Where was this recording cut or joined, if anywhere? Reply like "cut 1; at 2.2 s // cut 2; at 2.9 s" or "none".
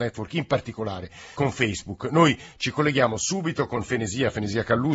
cut 1; at 1.3 s